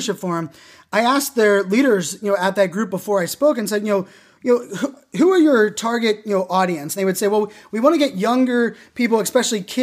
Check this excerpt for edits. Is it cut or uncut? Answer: uncut